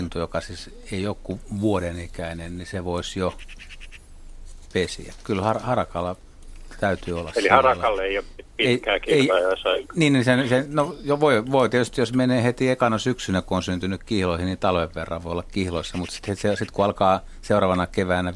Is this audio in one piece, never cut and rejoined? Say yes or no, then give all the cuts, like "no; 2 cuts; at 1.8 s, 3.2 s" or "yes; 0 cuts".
yes; 0 cuts